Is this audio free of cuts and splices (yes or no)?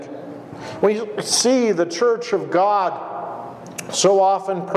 yes